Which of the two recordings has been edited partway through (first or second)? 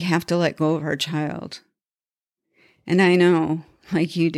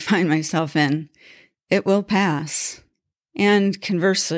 second